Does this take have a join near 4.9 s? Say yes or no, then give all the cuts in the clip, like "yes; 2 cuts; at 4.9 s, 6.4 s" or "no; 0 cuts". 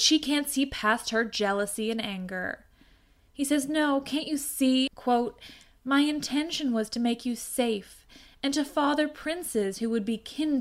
yes; 1 cut; at 4.9 s